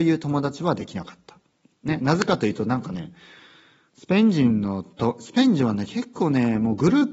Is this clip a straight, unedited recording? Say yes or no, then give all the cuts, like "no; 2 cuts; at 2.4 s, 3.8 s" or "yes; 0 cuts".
yes; 0 cuts